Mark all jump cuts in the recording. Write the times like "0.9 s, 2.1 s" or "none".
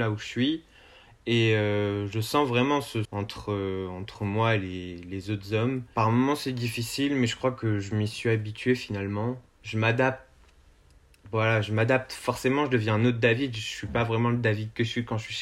3.0 s